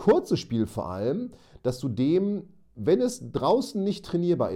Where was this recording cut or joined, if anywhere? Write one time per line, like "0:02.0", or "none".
none